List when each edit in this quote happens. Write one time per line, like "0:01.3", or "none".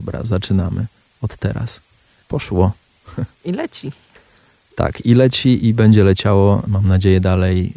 0:02.2
0:05.6
0:06.7